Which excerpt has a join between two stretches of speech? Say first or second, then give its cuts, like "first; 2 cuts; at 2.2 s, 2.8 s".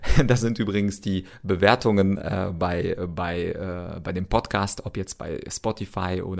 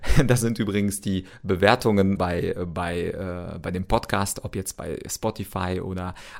second; 1 cut; at 2.2 s